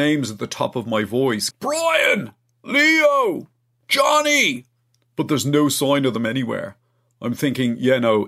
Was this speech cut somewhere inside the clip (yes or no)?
yes